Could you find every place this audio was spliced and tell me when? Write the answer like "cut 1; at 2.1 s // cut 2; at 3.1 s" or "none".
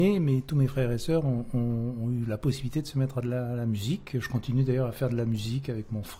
none